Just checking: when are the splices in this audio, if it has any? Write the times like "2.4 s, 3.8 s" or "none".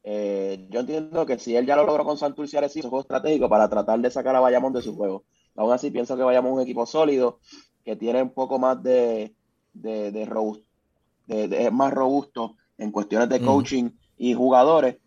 2.8 s